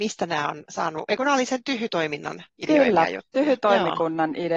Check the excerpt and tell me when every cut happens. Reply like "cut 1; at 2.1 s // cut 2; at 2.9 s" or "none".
none

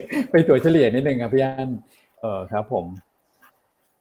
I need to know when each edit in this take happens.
cut 1; at 2.2 s

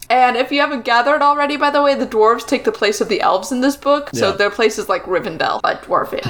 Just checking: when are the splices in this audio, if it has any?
none

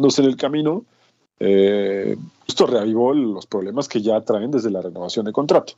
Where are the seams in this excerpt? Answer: cut 1; at 1.2 s // cut 2; at 2.5 s

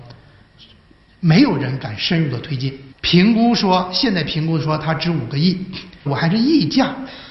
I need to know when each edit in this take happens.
cut 1; at 2.9 s // cut 2; at 6.1 s

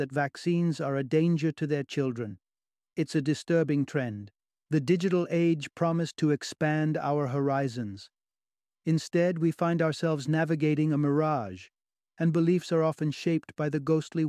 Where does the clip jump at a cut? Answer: cut 1; at 4.6 s // cut 2; at 12.1 s

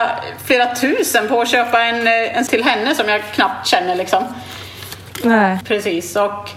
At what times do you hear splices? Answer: cut 1; at 2.5 s // cut 2; at 5.6 s

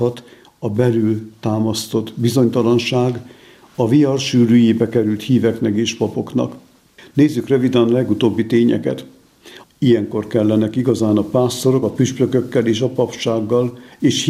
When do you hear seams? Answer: cut 1; at 9.6 s // cut 2; at 11.8 s

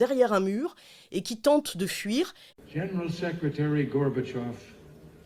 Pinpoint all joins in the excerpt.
cut 1; at 2.5 s

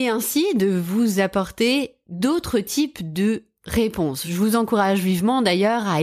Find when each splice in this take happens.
none

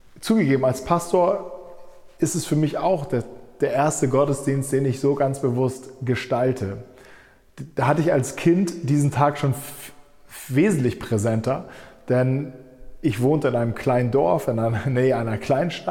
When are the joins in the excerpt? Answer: none

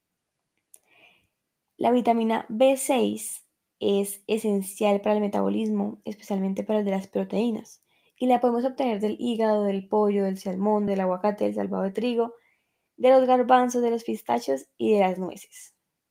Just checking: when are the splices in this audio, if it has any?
cut 1; at 10.9 s

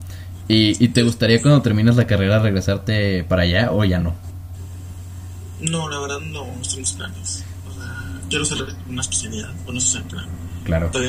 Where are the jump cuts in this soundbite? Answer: none

